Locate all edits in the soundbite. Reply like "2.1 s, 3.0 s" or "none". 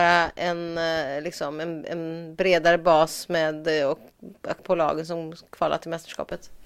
4.6 s